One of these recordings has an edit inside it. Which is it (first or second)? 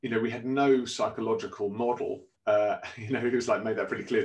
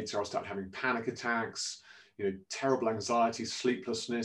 first